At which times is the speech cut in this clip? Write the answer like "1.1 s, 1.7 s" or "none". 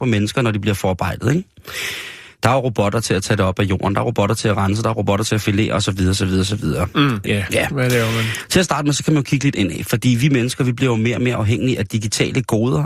7.2 s